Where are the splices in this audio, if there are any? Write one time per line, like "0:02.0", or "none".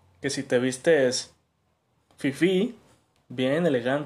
0:03.1